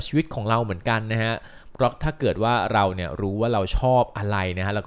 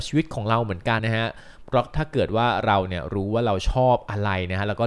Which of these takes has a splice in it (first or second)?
second